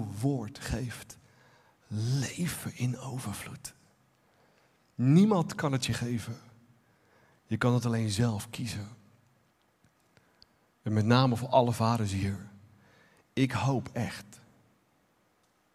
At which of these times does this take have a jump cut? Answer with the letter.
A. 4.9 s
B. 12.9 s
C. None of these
C